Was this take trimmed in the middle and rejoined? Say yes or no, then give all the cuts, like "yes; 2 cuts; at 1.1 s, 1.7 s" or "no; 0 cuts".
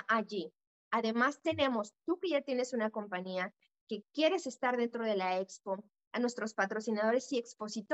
no; 0 cuts